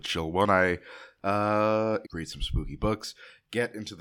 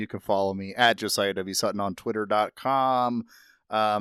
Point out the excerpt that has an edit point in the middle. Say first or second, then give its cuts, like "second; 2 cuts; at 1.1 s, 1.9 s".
first; 1 cut; at 2.0 s